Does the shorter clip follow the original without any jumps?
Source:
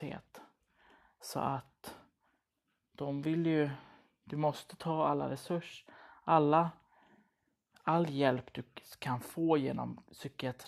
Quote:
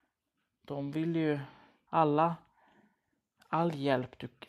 no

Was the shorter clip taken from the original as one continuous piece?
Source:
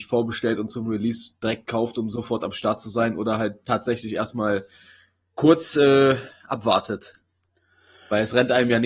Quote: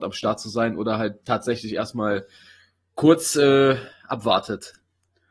yes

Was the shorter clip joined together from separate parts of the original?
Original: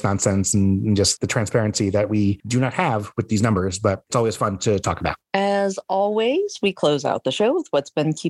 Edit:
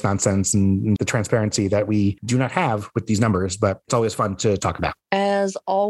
yes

